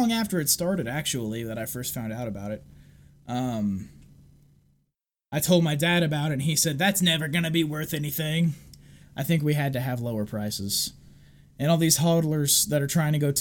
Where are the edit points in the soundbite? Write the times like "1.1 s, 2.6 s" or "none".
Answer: 9.0 s